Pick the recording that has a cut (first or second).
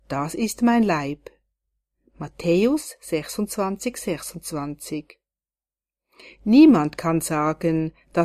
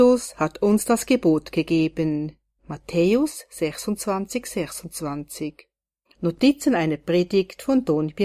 second